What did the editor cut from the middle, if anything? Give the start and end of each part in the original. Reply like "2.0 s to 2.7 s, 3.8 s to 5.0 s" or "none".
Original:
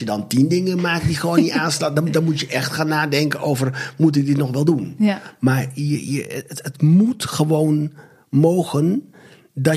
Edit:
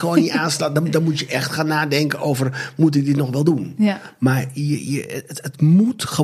none